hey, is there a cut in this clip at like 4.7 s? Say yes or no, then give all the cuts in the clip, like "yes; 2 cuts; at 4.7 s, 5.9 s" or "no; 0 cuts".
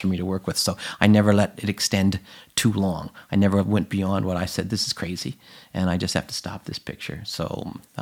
no; 0 cuts